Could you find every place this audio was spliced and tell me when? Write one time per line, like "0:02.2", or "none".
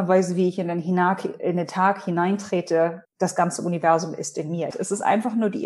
0:03.0
0:04.7